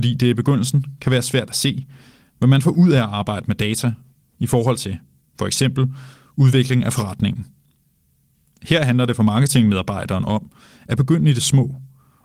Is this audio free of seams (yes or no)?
yes